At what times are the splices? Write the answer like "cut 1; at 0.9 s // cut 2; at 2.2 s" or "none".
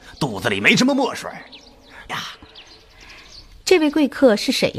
cut 1; at 2.1 s